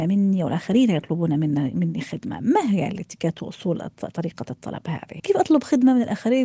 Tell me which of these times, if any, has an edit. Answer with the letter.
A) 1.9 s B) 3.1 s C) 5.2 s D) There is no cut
C